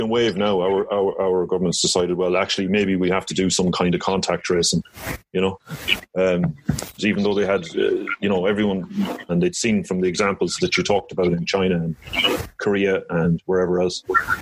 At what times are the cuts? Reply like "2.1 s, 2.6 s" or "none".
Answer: 7.0 s, 9.3 s